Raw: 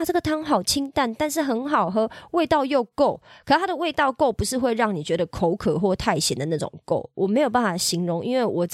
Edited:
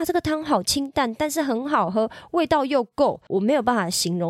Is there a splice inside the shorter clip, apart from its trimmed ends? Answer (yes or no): yes